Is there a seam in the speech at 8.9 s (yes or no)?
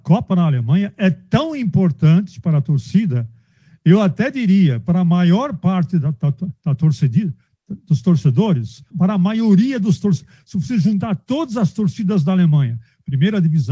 yes